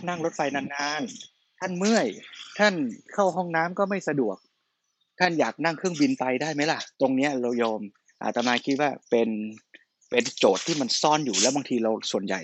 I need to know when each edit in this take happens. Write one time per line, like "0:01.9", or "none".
0:06.9
0:09.0